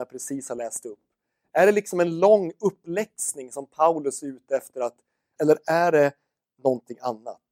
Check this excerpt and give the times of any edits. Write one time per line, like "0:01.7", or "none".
0:05.4